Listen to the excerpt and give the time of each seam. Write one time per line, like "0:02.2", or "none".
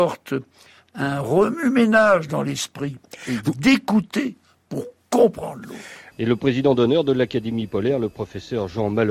0:06.1